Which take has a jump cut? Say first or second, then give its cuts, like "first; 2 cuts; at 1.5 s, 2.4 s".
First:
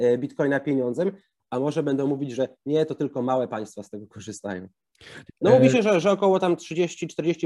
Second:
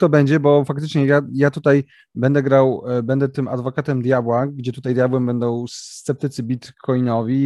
first; 1 cut; at 5.3 s